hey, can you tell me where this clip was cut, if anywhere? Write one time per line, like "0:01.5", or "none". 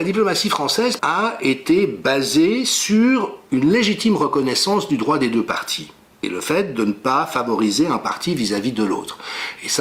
0:01.0
0:03.4